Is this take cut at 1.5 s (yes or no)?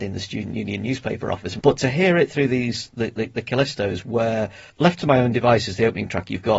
no